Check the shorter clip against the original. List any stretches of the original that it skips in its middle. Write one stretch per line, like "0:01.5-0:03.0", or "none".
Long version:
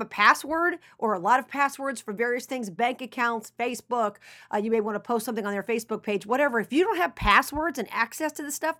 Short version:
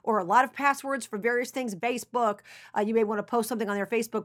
0:02.7-0:03.5

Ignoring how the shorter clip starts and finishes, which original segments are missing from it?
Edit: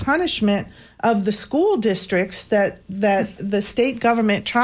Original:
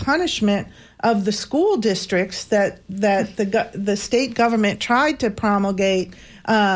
0:03.4-0:03.7

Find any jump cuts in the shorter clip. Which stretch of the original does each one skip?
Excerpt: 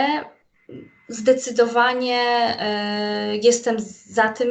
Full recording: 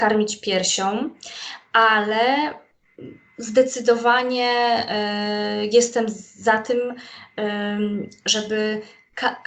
none

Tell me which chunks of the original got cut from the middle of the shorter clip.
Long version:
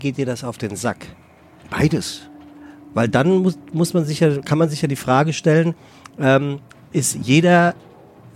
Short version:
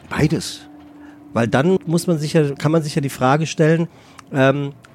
0:03.4-0:03.6

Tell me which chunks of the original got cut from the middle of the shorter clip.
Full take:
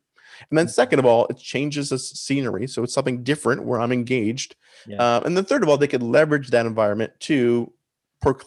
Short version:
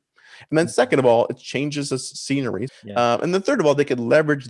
0:02.7-0:04.7

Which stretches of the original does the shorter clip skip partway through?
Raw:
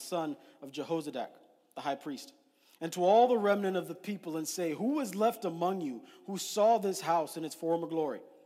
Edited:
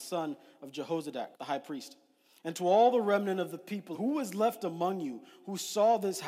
0:01.3-0:01.7
0:04.3-0:04.7

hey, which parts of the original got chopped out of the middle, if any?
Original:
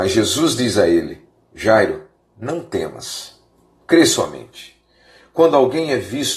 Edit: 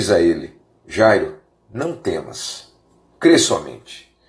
none

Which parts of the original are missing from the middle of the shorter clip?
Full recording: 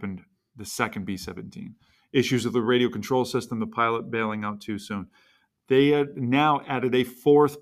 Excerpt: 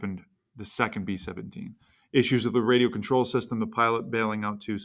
none

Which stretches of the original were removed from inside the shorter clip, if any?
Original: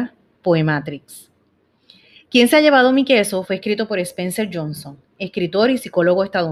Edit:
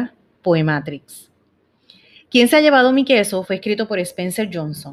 none

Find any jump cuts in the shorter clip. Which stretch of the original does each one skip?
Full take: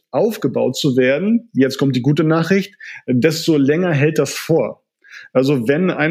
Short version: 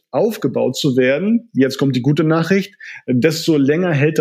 none

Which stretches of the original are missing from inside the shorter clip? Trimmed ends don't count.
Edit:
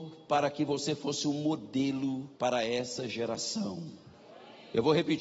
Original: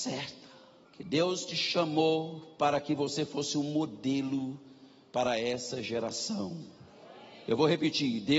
0:04.6-0:05.1

